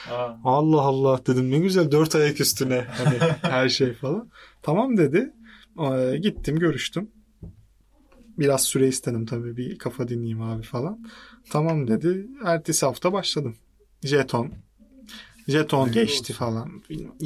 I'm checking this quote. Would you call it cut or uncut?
uncut